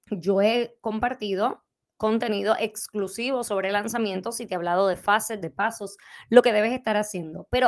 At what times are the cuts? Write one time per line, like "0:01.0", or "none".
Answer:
0:05.4